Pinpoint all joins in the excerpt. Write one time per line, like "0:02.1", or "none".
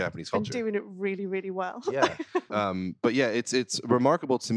0:02.5